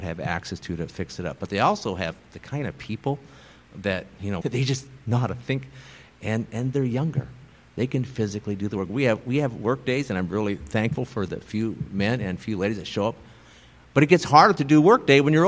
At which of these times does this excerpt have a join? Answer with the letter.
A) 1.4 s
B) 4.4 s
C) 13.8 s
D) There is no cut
B